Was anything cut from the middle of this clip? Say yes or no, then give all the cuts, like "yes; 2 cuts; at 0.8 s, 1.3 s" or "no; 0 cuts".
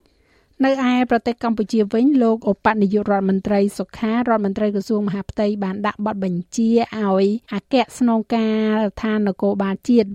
yes; 2 cuts; at 3.7 s, 7.4 s